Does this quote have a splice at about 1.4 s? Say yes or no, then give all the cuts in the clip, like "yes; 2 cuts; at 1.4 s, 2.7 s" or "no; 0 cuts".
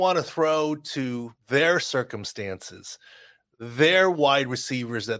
yes; 1 cut; at 1.4 s